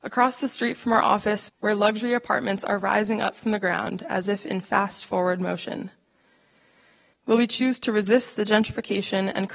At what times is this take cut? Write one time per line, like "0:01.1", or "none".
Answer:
0:01.5
0:07.1